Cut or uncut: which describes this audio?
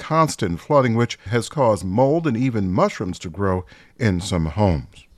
cut